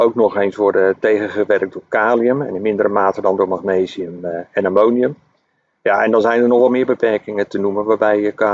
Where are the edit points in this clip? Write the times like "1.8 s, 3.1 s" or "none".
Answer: none